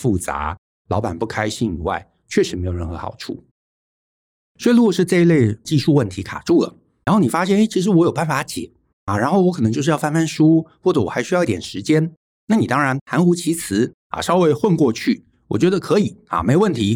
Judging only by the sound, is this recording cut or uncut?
uncut